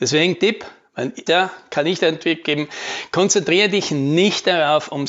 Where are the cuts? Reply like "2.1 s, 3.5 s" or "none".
1.3 s